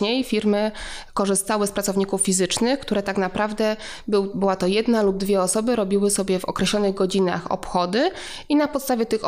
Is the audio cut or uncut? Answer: uncut